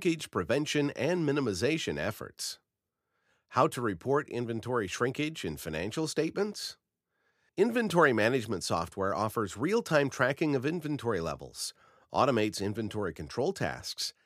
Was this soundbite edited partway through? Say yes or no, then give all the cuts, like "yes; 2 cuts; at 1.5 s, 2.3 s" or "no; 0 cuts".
yes; 1 cut; at 7.5 s